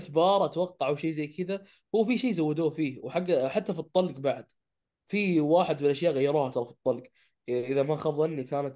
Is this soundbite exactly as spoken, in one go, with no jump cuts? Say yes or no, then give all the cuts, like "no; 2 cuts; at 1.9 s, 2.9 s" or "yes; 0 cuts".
yes; 0 cuts